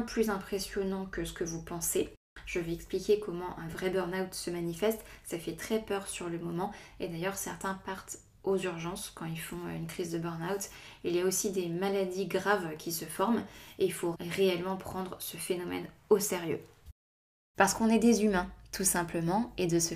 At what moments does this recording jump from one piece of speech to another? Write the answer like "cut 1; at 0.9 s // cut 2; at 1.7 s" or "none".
cut 1; at 14.1 s // cut 2; at 17.5 s